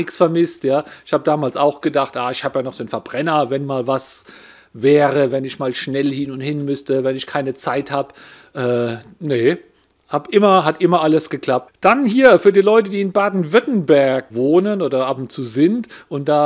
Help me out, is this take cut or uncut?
cut